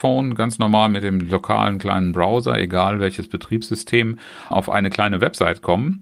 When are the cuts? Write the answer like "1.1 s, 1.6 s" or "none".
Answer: 4.5 s